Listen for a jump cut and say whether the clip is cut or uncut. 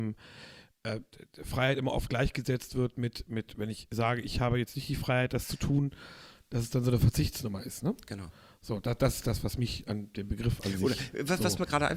uncut